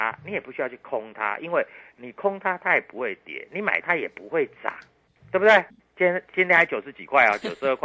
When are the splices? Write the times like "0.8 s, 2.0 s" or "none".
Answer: 3.8 s, 5.8 s